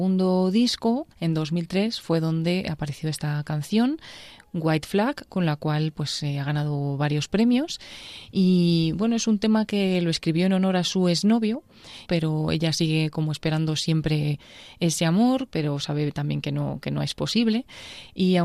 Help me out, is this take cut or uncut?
cut